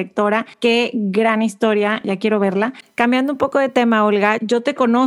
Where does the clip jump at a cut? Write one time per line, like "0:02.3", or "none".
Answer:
none